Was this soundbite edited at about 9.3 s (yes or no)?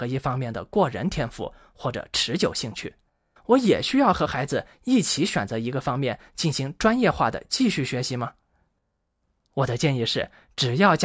no